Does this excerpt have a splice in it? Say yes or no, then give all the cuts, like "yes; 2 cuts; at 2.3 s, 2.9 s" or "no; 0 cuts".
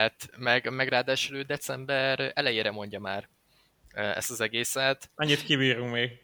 yes; 1 cut; at 5.1 s